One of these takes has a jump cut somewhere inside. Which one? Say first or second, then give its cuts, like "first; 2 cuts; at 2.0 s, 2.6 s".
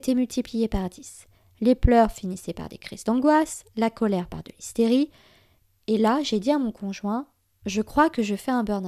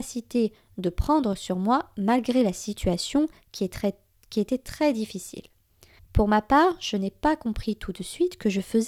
second; 1 cut; at 6.0 s